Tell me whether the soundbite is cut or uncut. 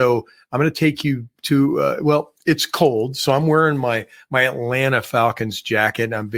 uncut